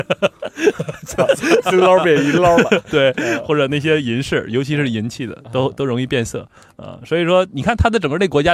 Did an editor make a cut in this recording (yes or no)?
no